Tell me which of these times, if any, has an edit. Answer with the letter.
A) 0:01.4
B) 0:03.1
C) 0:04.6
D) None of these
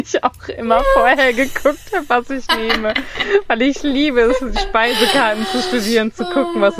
D